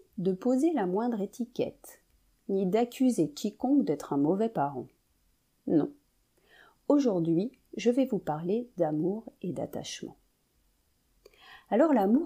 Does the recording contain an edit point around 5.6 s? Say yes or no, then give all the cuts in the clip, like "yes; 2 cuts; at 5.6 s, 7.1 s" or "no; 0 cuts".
no; 0 cuts